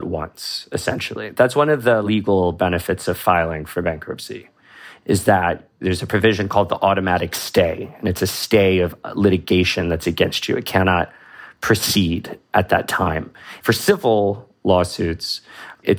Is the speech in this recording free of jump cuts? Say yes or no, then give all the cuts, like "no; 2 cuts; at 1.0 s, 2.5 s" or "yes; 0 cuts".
no; 1 cut; at 13.6 s